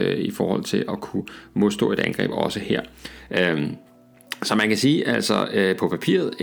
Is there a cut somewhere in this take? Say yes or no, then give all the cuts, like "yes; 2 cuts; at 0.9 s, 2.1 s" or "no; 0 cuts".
yes; 1 cut; at 3.3 s